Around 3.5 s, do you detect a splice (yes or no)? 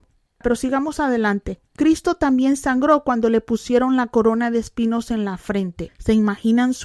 no